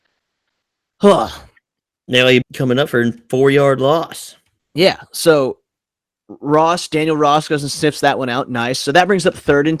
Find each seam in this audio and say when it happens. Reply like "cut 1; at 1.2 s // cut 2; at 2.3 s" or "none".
cut 1; at 2.4 s